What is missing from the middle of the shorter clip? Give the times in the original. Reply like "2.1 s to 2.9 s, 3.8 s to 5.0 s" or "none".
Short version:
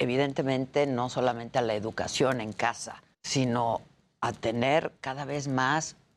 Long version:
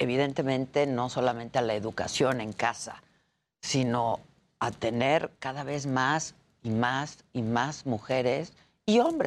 3.1 s to 3.5 s